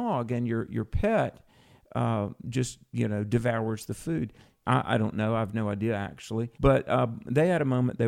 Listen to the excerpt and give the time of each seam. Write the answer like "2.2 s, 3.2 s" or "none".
4.6 s, 6.5 s